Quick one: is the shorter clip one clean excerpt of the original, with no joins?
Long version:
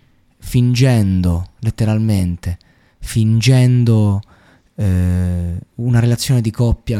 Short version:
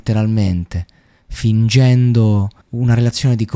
no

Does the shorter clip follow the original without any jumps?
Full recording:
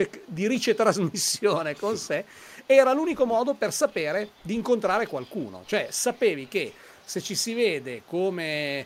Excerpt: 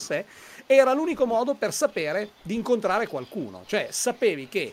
yes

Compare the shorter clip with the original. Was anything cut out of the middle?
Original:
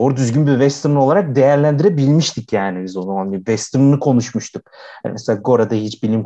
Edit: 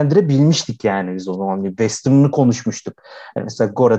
no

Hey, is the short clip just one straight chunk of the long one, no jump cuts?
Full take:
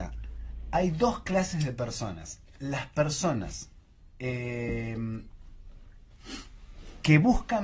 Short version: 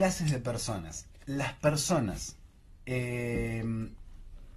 yes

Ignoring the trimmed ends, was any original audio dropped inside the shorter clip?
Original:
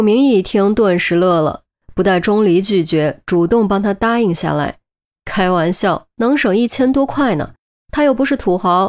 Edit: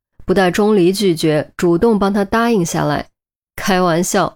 no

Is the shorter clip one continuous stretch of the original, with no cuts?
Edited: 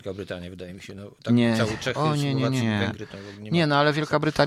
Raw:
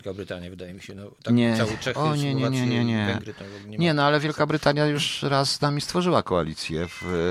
no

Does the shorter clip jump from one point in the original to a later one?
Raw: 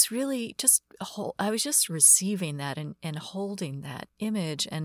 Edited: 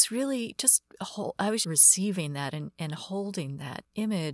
yes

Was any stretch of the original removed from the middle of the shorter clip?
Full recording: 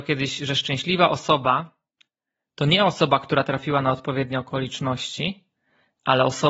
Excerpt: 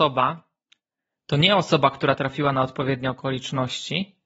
no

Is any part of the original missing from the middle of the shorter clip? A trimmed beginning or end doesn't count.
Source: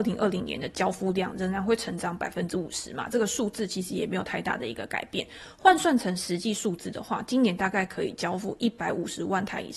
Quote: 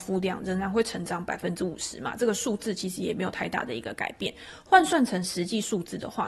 no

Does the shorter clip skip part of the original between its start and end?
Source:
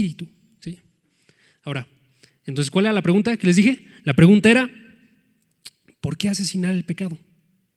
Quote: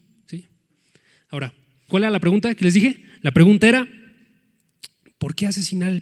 yes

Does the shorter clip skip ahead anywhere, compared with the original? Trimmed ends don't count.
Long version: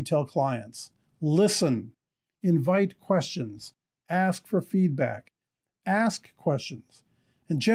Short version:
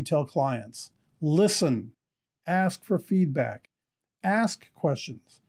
yes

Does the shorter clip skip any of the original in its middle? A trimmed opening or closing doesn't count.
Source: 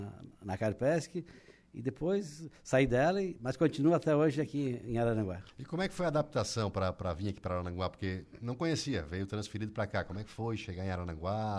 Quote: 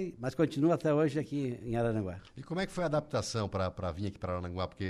no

